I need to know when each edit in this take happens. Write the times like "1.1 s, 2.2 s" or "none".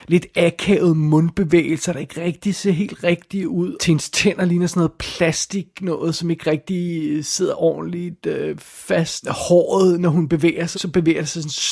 3.8 s, 9.2 s, 10.7 s